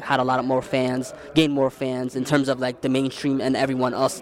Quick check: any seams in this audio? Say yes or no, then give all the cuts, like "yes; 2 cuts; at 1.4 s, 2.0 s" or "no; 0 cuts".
no; 0 cuts